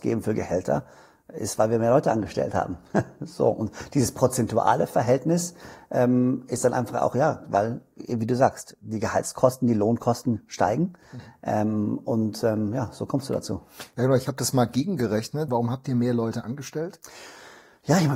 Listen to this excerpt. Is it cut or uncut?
cut